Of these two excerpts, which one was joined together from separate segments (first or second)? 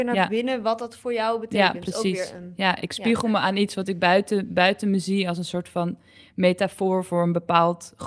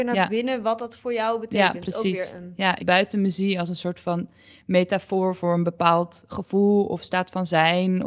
second